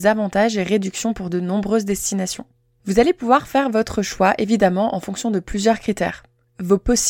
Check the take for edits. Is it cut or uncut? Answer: cut